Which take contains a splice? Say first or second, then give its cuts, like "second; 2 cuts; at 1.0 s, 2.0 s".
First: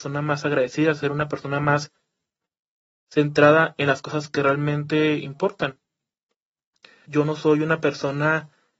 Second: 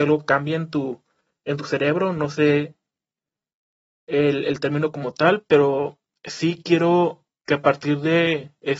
first; 1 cut; at 7.0 s